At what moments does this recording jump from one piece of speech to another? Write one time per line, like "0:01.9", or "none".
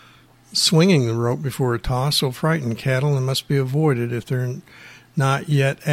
none